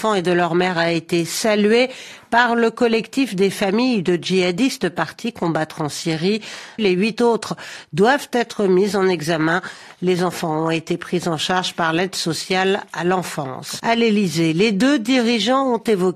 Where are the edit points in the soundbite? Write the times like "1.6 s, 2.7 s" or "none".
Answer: 6.8 s, 13.8 s